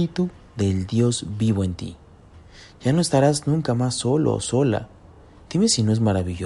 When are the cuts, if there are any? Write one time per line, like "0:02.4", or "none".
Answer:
none